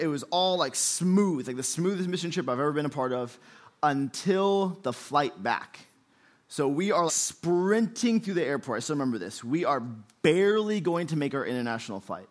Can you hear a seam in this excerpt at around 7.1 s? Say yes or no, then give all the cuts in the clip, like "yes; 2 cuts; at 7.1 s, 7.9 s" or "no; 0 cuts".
yes; 1 cut; at 7.1 s